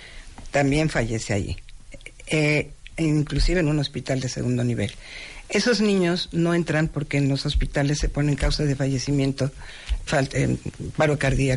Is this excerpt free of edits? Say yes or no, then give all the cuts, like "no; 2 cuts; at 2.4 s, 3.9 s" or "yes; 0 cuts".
no; 1 cut; at 10.1 s